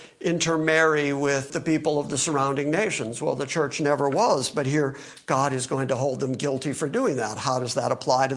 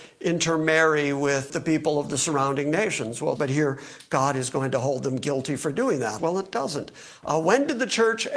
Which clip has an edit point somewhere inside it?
second; 2 cuts; at 3.3 s, 6.2 s

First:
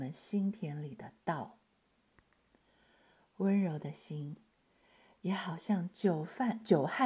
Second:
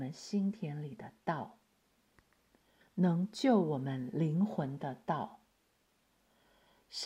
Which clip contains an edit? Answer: second; 1 cut; at 2.8 s

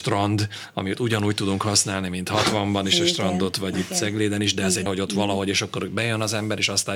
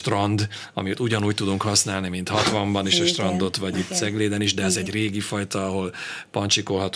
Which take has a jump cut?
first; 1 cut; at 4.9 s

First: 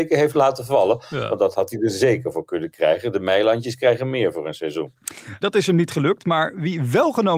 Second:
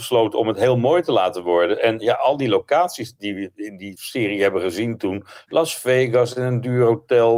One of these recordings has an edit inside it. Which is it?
first; 1 cut; at 5.4 s

